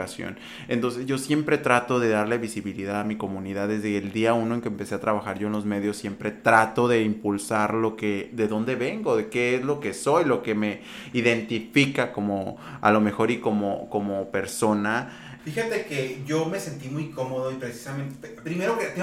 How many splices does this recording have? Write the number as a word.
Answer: one